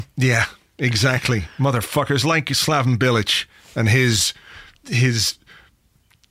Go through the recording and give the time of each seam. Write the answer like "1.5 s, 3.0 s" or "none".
none